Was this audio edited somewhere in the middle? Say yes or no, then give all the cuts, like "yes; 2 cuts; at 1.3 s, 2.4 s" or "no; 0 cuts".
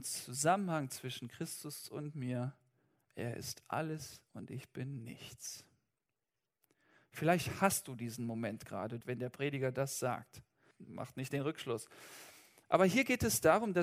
yes; 2 cuts; at 9.0 s, 10.7 s